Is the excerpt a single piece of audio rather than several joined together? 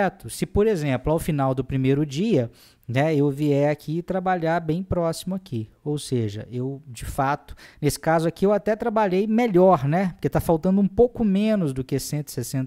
yes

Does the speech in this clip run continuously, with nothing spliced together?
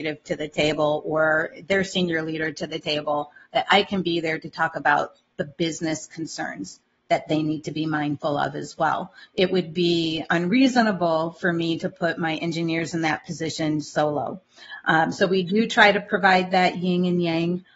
yes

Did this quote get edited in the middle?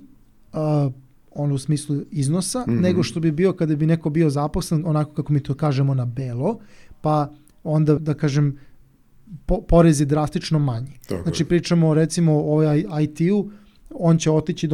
yes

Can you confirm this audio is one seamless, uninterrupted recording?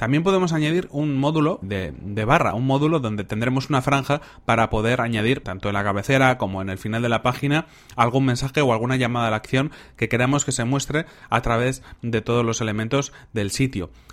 no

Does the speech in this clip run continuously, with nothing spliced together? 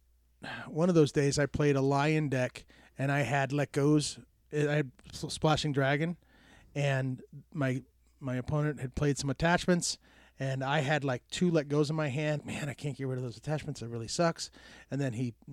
no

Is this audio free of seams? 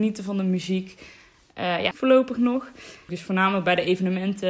no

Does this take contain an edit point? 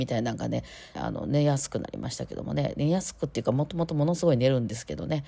yes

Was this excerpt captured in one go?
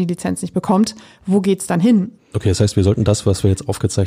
no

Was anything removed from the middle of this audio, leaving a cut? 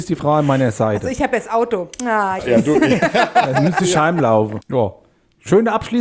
yes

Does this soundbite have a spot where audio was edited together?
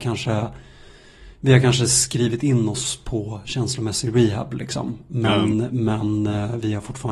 no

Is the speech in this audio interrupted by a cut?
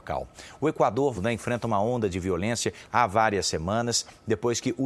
yes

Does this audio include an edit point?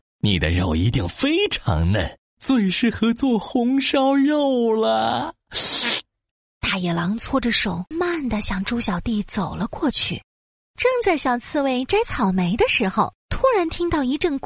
yes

